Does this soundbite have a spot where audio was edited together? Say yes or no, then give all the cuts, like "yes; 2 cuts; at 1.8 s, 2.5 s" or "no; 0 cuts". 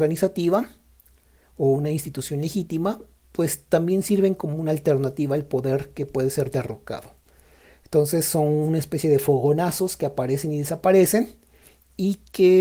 no; 0 cuts